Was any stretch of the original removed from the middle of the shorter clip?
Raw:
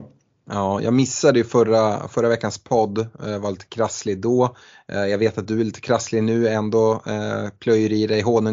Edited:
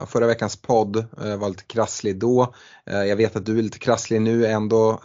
no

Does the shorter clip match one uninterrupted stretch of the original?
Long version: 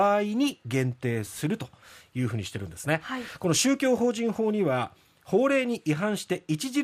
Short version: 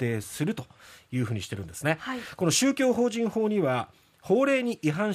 yes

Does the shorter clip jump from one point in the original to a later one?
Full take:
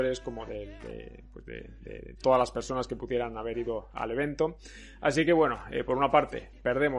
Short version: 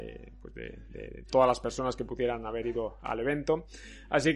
no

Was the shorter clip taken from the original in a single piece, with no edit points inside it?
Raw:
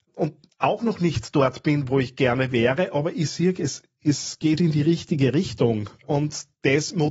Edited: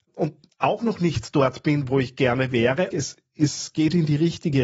no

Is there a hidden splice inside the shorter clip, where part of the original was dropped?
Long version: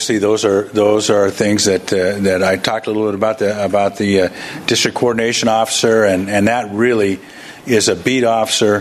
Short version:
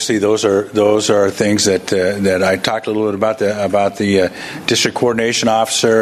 no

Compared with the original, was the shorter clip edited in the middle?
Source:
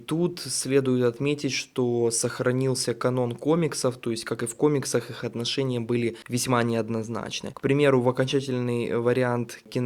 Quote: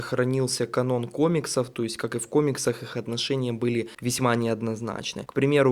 no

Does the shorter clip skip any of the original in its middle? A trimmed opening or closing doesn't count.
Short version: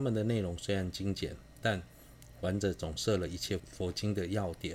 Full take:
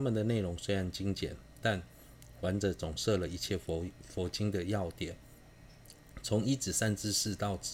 yes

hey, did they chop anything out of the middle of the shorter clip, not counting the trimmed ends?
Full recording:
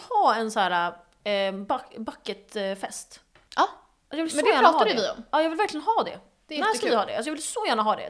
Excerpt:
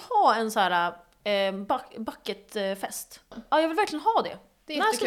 yes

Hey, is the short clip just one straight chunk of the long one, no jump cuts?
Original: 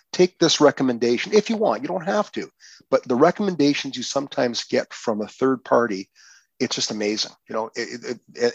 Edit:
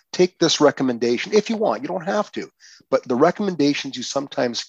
yes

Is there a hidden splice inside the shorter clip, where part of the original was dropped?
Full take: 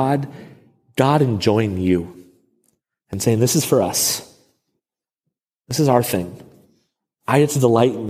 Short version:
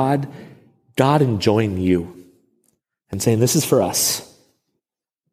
no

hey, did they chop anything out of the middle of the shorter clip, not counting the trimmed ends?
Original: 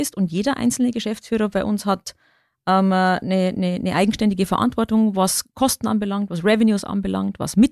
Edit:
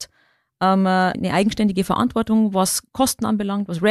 yes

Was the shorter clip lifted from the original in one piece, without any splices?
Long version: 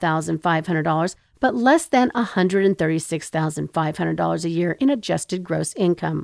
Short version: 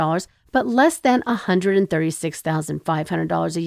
yes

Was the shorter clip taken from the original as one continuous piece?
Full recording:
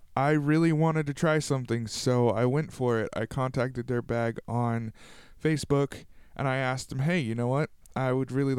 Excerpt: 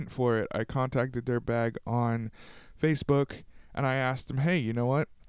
yes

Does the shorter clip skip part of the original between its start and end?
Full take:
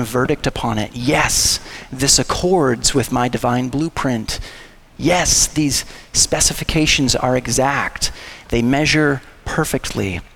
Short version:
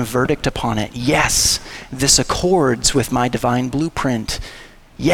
no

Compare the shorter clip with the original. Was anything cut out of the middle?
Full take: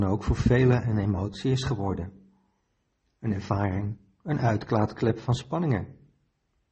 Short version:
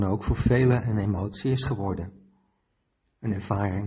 no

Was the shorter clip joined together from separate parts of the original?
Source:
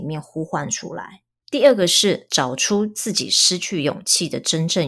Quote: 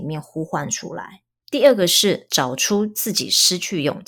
no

